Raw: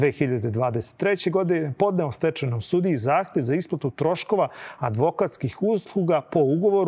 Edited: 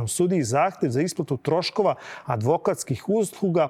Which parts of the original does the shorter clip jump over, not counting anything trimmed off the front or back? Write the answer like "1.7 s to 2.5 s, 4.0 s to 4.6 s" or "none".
none